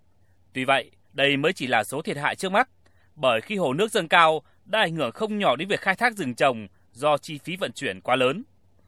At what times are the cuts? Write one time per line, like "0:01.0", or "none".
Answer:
none